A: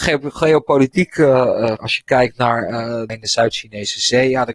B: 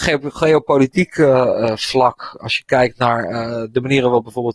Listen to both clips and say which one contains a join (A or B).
A